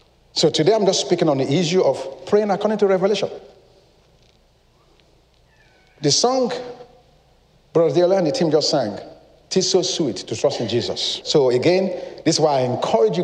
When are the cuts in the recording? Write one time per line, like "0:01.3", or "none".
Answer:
0:11.2